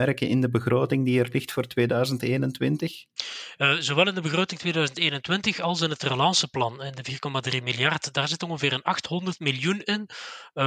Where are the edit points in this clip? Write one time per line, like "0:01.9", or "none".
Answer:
none